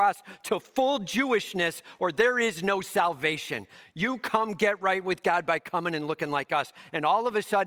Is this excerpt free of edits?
yes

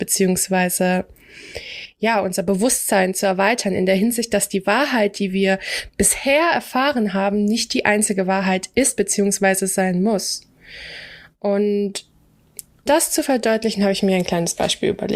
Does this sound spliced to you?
yes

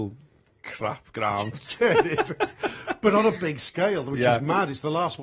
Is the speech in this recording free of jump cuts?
yes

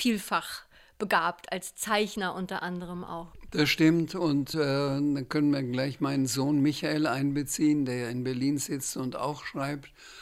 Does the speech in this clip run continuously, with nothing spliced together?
yes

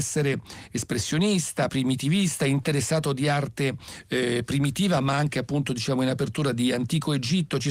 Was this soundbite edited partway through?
no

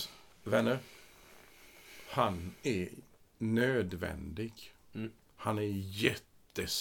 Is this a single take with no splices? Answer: yes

